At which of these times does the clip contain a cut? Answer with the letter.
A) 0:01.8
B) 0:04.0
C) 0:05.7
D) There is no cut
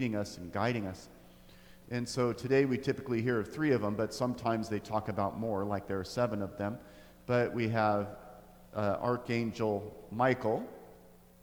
A